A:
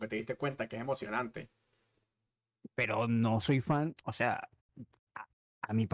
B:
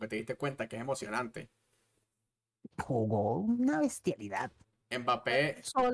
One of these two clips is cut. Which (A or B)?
B